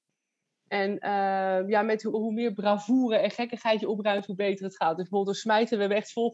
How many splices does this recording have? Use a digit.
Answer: 1